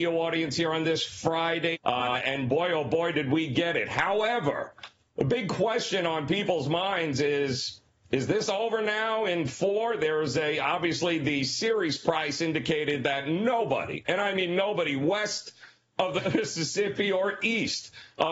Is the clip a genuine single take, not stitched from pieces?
no; 1 cut; at 1.7 s

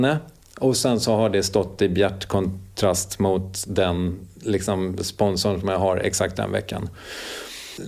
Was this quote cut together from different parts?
yes; 1 cut; at 6.3 s

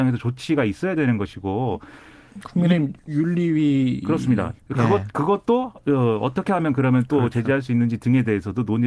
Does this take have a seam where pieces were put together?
yes; 1 cut; at 4.6 s

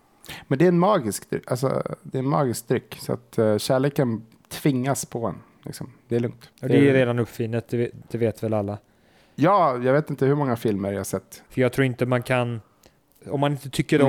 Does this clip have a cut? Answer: yes; 3 cuts; at 6.5 s, 8.1 s, 11.5 s

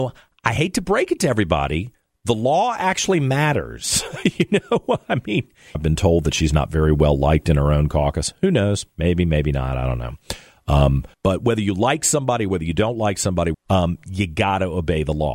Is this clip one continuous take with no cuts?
no; 3 cuts; at 5.7 s, 11.1 s, 13.5 s

